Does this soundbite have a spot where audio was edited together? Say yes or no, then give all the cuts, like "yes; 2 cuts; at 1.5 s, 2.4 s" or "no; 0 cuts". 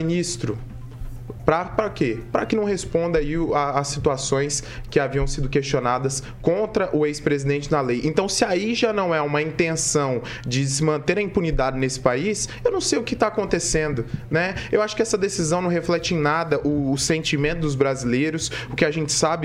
no; 0 cuts